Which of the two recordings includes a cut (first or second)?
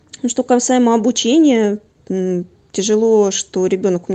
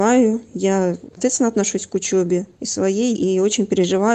second